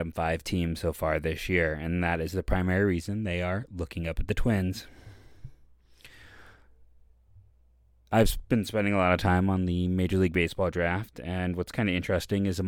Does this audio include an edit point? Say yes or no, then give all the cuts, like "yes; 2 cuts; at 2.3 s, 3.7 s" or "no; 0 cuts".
no; 0 cuts